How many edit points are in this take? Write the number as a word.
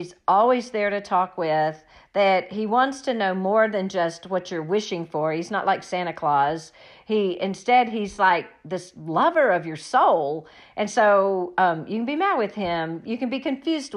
zero